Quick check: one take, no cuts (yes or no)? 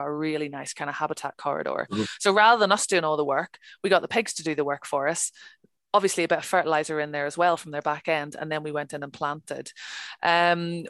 yes